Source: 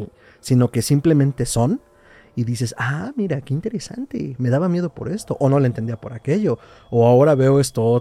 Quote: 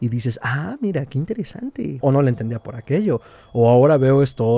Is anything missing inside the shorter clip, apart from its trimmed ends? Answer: yes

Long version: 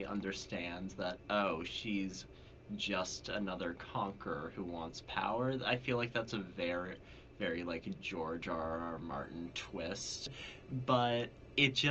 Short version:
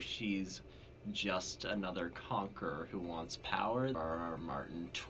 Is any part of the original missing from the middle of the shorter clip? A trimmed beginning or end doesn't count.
yes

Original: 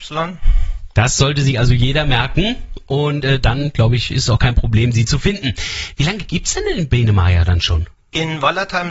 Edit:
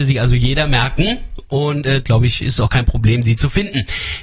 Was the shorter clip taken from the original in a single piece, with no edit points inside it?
no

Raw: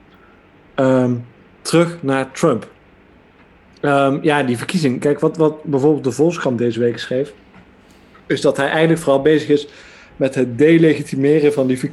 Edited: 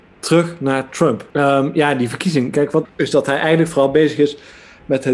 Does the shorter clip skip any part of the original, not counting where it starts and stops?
yes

